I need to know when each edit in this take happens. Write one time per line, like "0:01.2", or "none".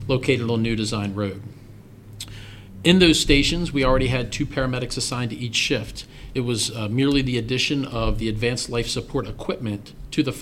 none